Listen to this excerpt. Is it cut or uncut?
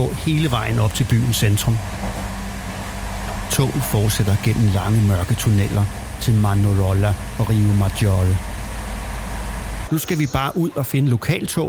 cut